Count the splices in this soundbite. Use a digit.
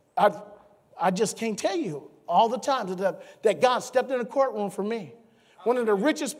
0